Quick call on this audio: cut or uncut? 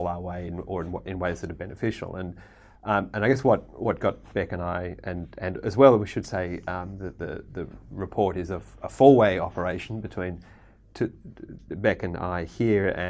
uncut